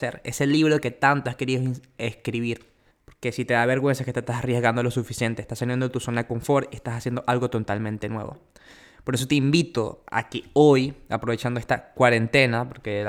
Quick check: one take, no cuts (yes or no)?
no